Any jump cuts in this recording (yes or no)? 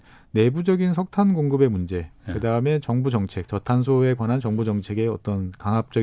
no